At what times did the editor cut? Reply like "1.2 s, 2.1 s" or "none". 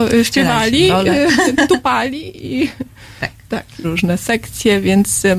3.8 s